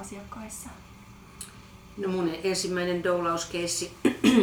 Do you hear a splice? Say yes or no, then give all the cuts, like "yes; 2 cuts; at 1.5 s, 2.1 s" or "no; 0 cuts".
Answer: no; 0 cuts